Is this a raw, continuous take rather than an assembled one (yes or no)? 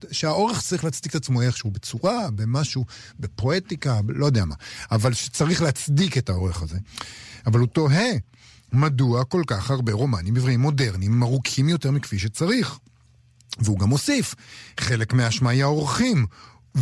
yes